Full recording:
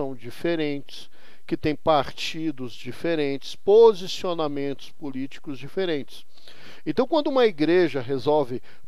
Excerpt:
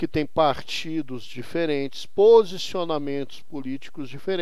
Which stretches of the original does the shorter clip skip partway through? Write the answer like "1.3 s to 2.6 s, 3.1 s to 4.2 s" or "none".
none